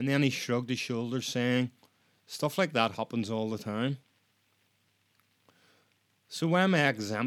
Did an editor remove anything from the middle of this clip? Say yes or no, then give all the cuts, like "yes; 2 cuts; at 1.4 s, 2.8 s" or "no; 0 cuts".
no; 0 cuts